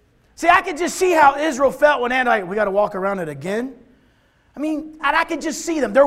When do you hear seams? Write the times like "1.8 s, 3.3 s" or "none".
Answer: 5.0 s